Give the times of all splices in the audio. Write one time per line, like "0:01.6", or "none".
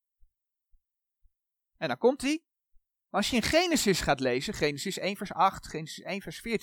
0:03.1